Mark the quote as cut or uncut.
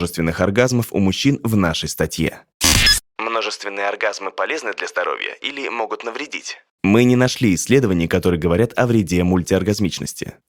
uncut